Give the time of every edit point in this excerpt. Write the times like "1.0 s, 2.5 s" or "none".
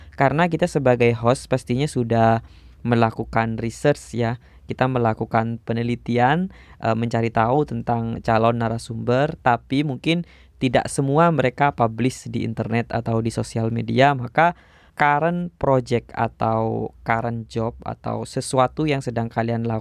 14.9 s